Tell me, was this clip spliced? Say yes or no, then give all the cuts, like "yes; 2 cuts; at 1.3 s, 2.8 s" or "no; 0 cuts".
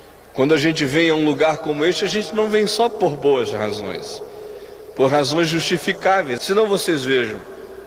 yes; 1 cut; at 6.4 s